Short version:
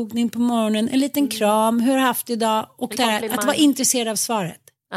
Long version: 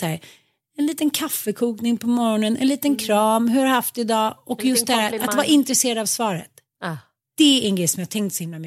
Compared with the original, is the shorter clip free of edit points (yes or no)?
no